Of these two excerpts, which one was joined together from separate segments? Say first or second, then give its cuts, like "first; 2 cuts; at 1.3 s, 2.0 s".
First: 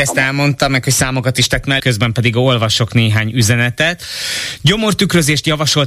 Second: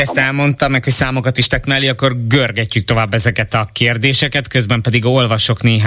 first; 1 cut; at 1.8 s